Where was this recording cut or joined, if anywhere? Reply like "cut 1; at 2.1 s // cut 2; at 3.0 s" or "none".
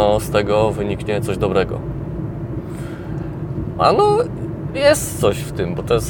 cut 1; at 3.8 s